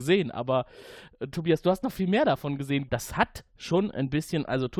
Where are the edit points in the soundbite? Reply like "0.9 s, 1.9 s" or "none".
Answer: 2.9 s